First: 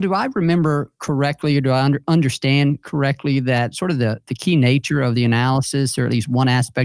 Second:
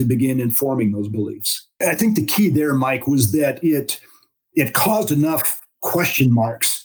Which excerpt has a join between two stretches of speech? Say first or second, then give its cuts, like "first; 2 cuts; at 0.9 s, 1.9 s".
second; 1 cut; at 1.8 s